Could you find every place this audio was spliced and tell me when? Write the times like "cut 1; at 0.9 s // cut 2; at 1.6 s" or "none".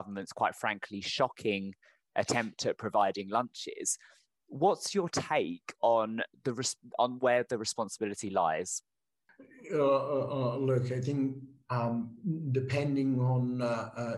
none